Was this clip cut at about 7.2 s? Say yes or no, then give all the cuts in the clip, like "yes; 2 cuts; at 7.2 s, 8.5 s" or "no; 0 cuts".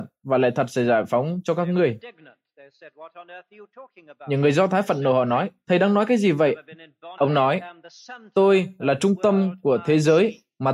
yes; 1 cut; at 7.2 s